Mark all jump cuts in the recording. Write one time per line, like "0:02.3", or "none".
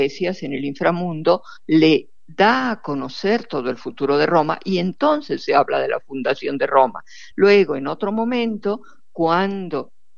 none